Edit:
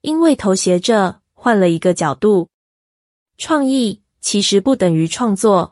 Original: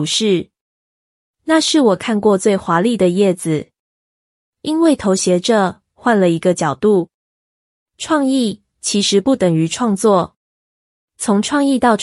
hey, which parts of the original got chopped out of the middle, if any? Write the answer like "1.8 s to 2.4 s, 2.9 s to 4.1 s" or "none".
none